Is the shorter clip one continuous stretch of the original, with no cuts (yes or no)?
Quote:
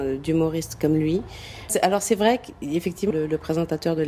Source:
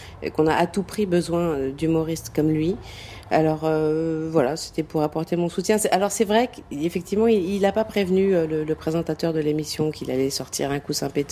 no